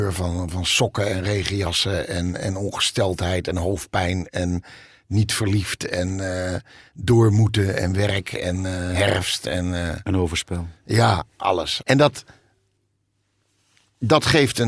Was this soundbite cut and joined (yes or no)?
yes